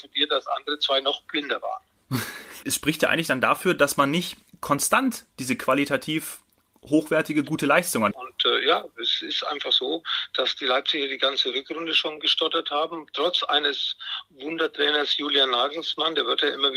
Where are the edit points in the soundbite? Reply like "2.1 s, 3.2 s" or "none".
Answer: 2.6 s, 8.1 s